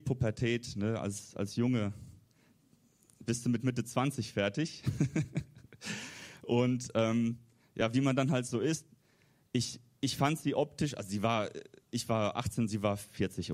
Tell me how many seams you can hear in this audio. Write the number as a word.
zero